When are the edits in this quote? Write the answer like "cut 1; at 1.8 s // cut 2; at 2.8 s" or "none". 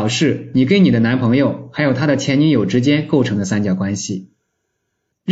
none